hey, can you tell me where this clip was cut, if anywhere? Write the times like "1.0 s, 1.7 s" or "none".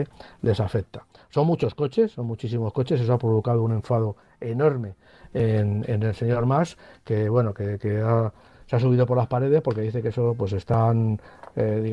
none